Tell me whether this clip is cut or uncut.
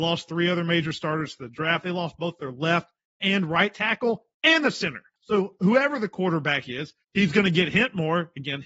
cut